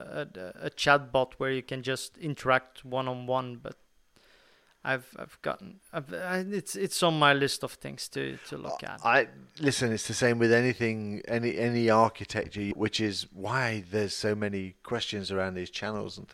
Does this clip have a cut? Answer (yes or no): yes